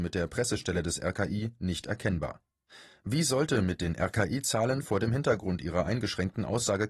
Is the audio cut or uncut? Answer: uncut